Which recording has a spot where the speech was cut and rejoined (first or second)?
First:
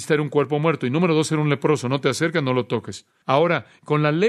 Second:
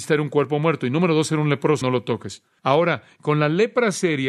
second